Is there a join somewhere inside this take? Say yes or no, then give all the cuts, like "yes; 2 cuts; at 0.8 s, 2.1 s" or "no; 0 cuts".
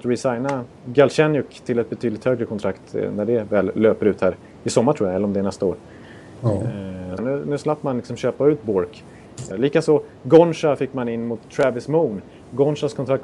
yes; 2 cuts; at 7.2 s, 9.5 s